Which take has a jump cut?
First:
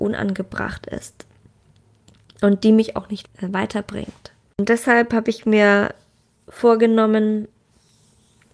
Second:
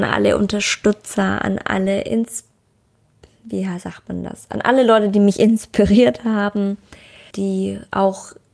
second; 1 cut; at 7.3 s

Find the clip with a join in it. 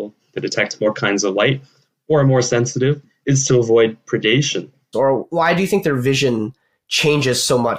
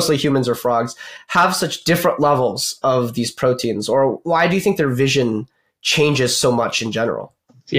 first; 1 cut; at 4.9 s

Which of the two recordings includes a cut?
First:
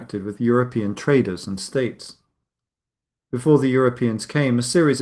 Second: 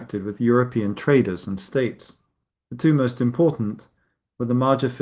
second; 1 cut; at 2.5 s

